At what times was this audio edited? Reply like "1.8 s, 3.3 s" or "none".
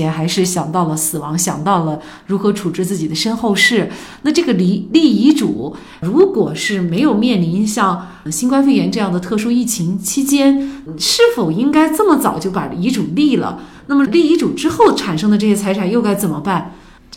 14.0 s